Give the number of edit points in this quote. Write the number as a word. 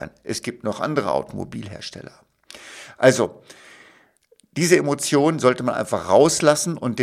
zero